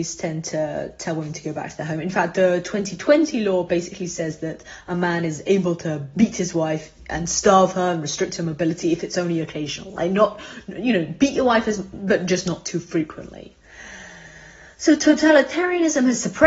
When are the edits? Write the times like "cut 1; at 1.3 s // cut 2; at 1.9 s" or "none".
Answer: none